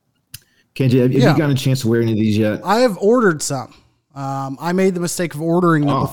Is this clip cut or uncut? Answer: uncut